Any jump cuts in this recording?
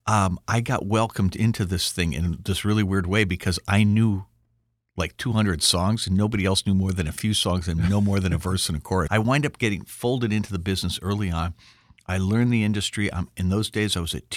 yes; 1 cut; at 9.1 s

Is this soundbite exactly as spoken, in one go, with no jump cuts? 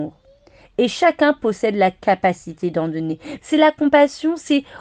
no; 1 cut; at 3.4 s

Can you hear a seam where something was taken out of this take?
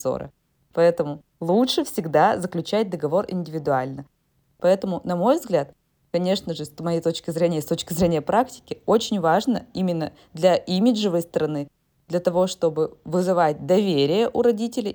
yes; 1 cut; at 4.4 s

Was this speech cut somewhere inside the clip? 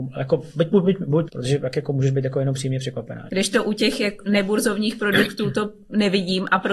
yes; 2 cuts; at 1.3 s, 3.3 s

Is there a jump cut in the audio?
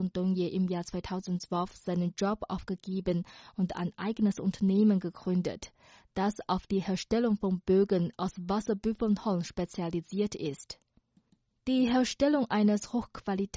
no; 0 cuts

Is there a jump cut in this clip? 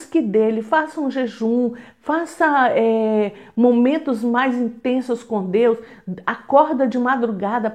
no; 0 cuts

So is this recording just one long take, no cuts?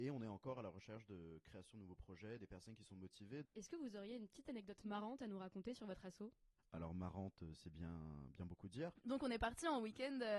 no; 1 cut; at 3.4 s

